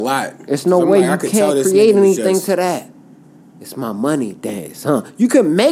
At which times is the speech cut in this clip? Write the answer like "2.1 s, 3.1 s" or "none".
none

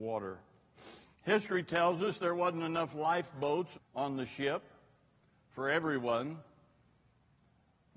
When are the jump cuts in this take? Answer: 3.7 s

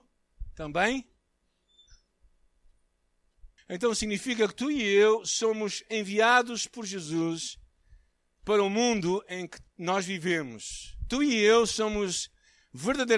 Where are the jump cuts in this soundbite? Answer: 3.6 s

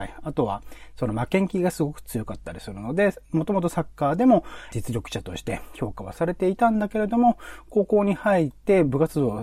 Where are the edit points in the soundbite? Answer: 4.7 s

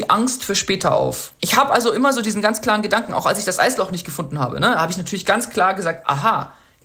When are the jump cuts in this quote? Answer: 1.4 s

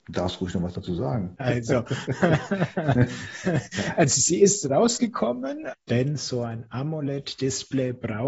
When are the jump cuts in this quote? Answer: 1.4 s, 5.7 s

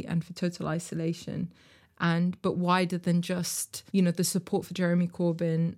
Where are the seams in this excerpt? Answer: 1.9 s, 3.9 s

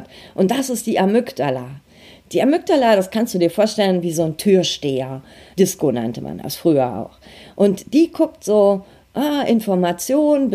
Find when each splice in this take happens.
5.5 s

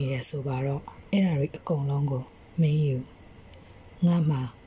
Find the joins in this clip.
1.1 s

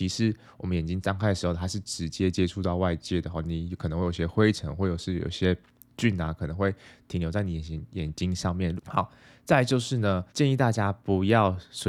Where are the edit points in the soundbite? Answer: 8.8 s, 10.3 s

